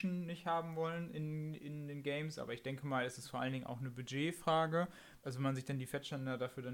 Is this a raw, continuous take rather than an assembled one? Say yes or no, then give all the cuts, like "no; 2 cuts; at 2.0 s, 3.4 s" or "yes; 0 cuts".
no; 1 cut; at 5.2 s